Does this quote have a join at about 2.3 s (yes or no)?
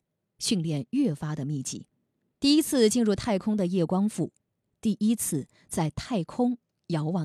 yes